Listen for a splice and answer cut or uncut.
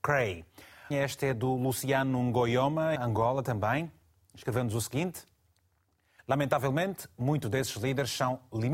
cut